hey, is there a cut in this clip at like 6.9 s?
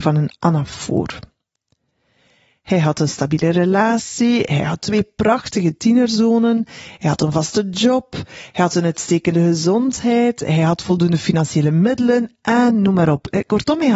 no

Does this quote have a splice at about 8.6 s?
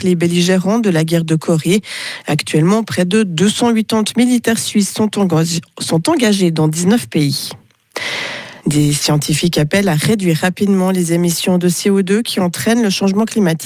yes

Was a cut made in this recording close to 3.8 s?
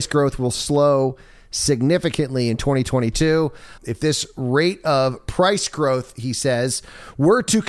yes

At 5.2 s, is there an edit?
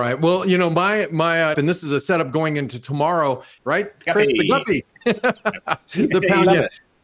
no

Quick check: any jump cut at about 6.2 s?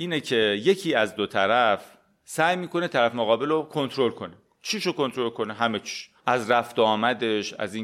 yes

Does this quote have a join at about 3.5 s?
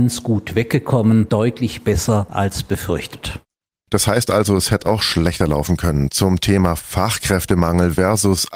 no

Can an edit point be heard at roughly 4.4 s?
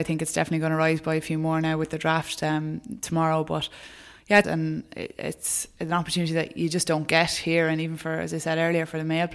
yes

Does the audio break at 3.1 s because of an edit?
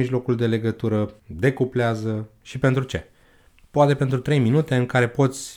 no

